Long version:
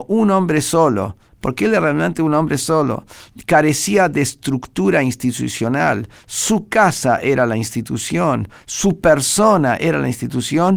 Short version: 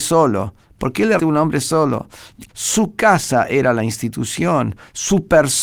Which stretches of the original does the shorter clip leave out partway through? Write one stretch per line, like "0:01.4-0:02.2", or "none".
0:01.8-0:02.2
0:03.5-0:06.2